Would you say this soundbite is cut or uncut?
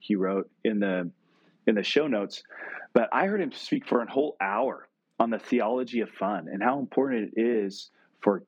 uncut